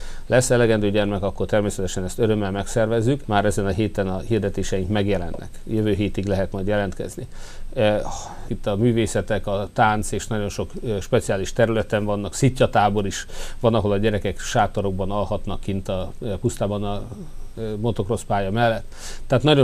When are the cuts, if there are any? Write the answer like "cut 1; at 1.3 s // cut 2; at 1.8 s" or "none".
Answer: cut 1; at 3.2 s // cut 2; at 8.5 s // cut 3; at 12.3 s